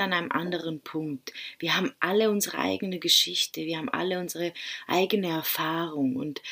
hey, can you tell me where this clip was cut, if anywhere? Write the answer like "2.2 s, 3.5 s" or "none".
none